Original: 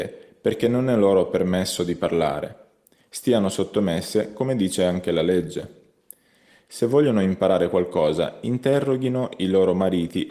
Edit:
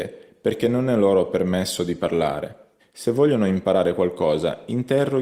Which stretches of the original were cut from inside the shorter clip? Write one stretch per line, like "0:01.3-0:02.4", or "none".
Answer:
0:02.8-0:06.5